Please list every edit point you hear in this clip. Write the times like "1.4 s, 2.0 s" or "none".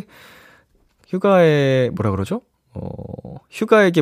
none